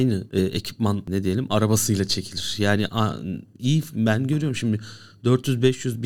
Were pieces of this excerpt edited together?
no; 0 cuts

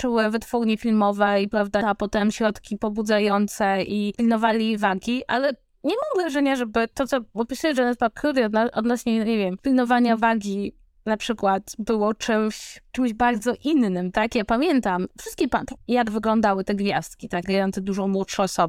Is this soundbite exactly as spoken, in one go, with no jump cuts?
no; 3 cuts; at 1.8 s, 15.8 s, 17.4 s

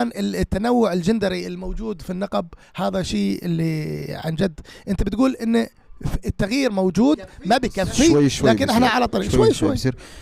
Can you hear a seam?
no; 0 cuts

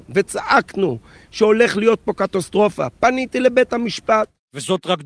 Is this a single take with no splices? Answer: yes; 0 cuts

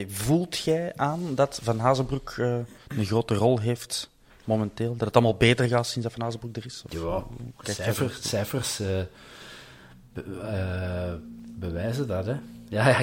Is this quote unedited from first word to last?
yes; 0 cuts

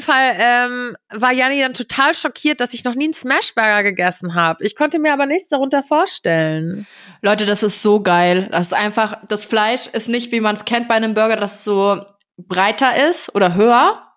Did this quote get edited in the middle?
no; 0 cuts

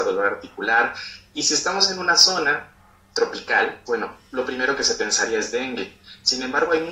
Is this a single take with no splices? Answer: no; 1 cut; at 3.9 s

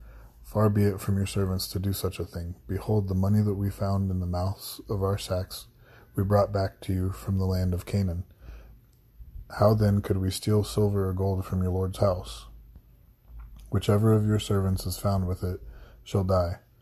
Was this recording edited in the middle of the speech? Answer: no; 0 cuts

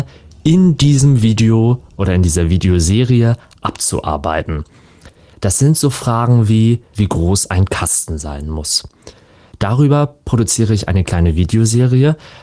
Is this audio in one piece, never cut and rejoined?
no; 2 cuts; at 6.9 s, 9.5 s

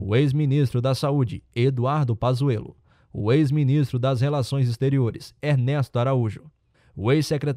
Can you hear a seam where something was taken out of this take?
no; 0 cuts

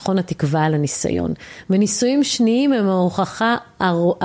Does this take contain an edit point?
no; 0 cuts

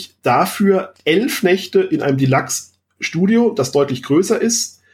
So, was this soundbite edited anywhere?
no; 0 cuts

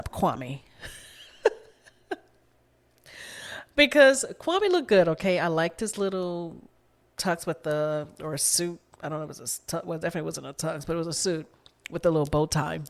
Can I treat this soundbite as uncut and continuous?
yes; 0 cuts

